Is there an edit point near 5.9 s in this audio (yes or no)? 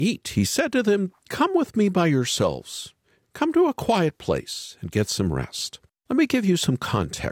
yes